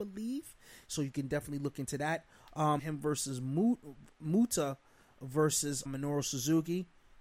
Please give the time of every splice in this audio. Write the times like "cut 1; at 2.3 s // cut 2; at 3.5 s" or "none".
cut 1; at 2.8 s // cut 2; at 5.9 s